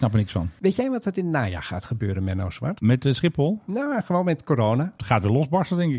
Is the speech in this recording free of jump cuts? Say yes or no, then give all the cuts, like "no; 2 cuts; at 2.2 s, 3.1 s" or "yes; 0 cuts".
yes; 0 cuts